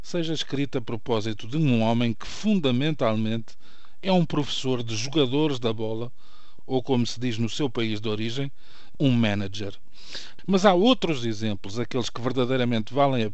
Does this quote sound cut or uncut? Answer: cut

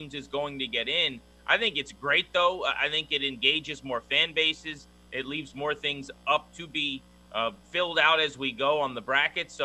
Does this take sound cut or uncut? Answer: cut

